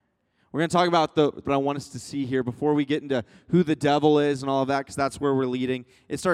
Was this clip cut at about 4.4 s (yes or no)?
no